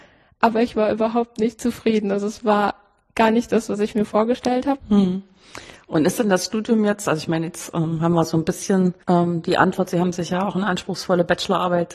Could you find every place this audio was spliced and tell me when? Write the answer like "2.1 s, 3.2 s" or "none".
4.8 s, 9.0 s